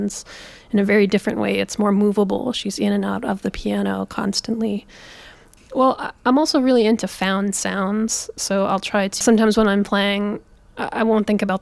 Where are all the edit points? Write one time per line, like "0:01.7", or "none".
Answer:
0:05.6
0:09.2